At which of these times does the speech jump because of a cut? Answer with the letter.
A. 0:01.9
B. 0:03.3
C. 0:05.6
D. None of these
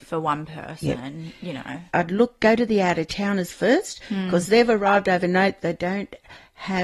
A